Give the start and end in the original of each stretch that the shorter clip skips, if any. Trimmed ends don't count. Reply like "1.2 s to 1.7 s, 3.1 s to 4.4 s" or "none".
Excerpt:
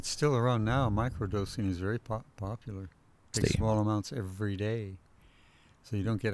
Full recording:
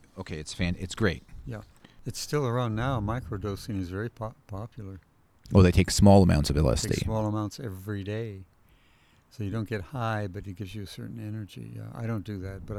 5.4 s to 6.8 s